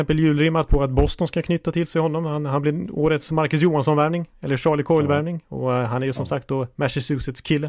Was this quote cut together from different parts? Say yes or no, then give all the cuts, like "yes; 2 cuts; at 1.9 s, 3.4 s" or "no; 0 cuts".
no; 0 cuts